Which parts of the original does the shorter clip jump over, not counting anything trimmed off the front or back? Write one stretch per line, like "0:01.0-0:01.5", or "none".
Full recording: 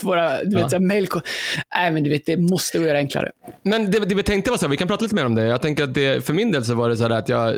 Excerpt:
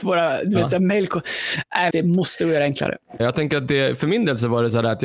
0:01.9-0:02.2
0:03.5-0:05.5